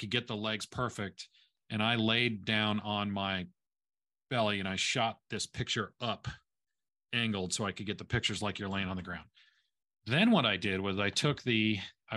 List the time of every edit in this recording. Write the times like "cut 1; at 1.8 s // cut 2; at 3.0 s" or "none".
none